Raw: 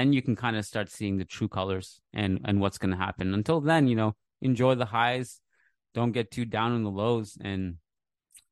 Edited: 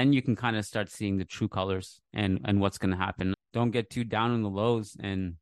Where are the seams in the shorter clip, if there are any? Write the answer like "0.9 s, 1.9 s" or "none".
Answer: 3.3 s